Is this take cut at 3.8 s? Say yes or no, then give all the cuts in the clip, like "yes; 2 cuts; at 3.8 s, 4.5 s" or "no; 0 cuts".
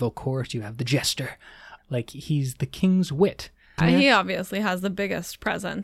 yes; 2 cuts; at 1.8 s, 3.8 s